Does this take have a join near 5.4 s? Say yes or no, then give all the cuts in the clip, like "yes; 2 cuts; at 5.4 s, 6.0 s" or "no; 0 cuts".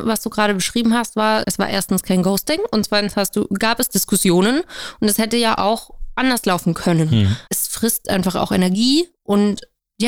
no; 2 cuts; at 1.4 s, 7.5 s